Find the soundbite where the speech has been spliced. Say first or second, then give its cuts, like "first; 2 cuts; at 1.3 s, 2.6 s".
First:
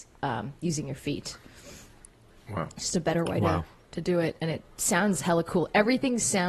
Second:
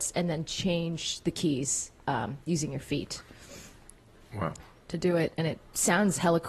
second; 1 cut; at 4.6 s